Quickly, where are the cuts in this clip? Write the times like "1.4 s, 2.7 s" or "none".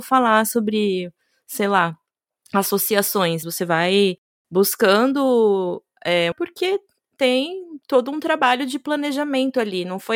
3.4 s, 6.3 s